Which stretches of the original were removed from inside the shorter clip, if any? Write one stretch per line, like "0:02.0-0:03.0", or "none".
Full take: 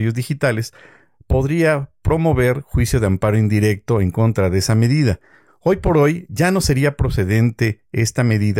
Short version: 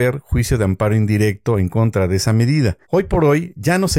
0:05.3-0:05.6